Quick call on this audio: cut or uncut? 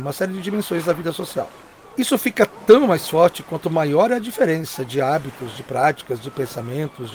uncut